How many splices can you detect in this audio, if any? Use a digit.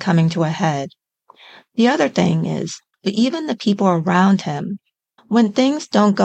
2